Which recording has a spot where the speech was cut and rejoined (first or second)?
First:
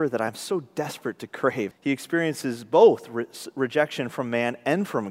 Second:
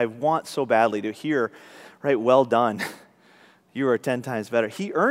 first